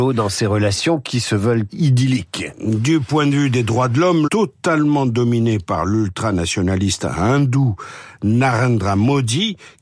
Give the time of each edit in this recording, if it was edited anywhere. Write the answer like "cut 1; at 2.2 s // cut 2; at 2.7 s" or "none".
cut 1; at 1.7 s // cut 2; at 4.3 s